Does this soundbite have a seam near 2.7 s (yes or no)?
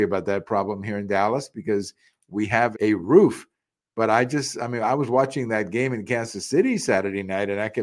yes